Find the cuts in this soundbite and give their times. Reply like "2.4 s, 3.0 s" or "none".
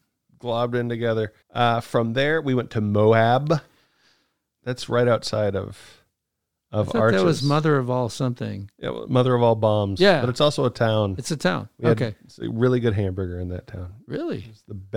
1.4 s